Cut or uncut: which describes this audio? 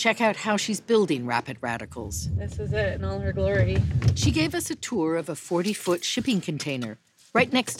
uncut